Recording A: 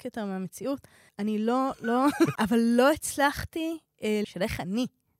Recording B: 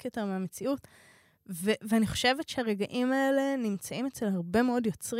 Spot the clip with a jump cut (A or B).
A